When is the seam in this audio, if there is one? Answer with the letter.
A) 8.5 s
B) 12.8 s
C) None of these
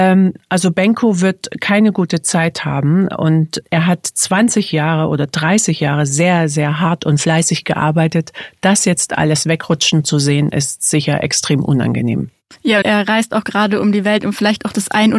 B